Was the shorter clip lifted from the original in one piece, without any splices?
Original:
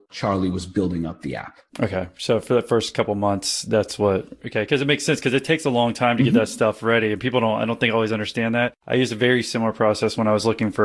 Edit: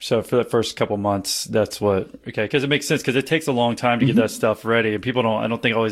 yes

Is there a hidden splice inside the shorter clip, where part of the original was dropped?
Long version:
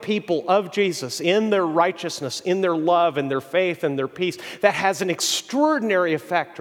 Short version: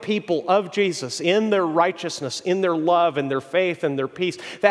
no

